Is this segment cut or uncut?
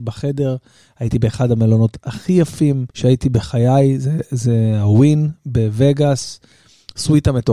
cut